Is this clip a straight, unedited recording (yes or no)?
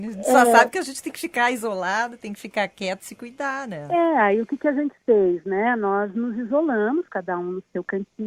yes